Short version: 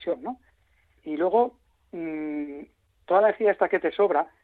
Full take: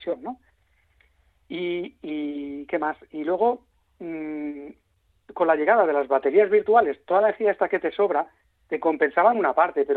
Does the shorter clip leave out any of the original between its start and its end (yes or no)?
yes